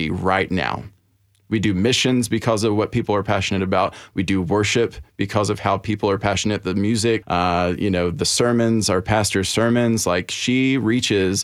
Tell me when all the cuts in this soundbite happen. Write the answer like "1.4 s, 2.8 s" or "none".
7.2 s

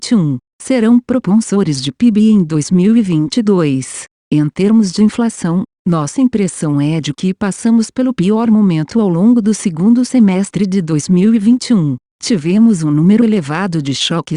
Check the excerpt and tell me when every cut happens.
4.2 s

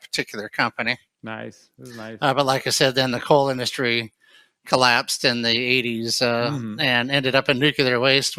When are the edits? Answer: none

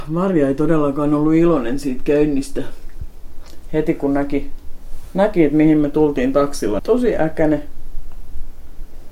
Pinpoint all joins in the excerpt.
6.8 s

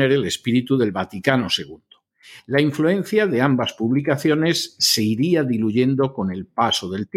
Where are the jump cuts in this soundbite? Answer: none

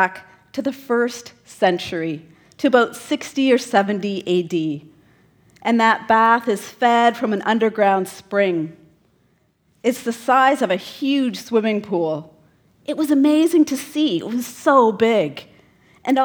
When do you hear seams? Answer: none

